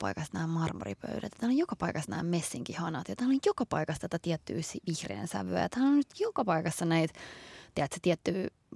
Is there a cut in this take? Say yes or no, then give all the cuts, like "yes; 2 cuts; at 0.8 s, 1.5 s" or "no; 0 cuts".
no; 0 cuts